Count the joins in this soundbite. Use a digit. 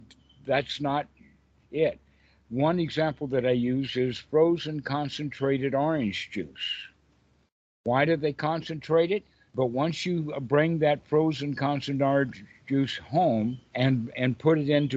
2